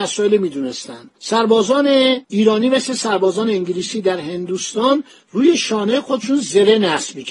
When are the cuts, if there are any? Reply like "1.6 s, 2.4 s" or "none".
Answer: 1.2 s, 2.2 s

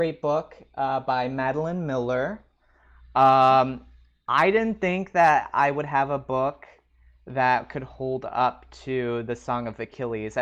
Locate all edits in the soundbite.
none

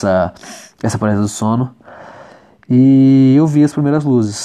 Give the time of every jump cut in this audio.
none

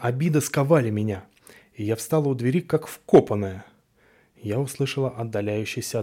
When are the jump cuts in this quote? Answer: none

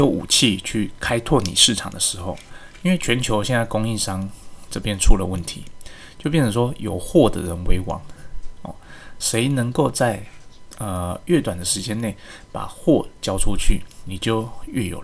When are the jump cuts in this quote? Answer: none

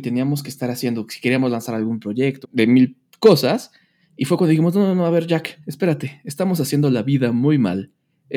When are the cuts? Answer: 2.4 s

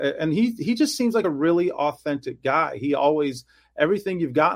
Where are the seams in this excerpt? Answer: none

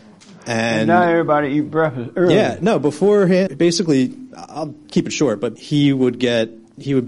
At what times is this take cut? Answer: 3.5 s, 5.6 s

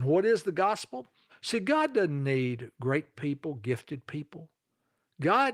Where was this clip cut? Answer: 1.3 s

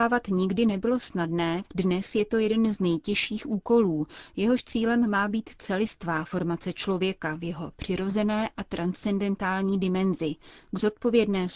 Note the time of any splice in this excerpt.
1.6 s

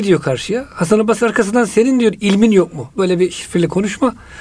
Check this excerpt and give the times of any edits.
none

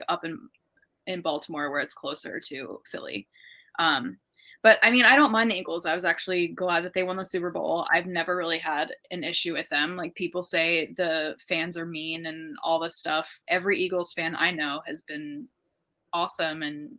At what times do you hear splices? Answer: 13.4 s

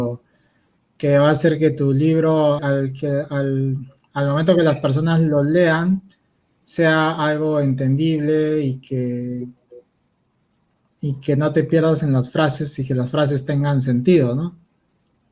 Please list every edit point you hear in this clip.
2.6 s

